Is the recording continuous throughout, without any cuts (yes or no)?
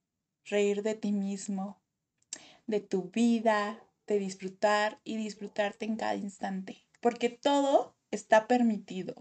yes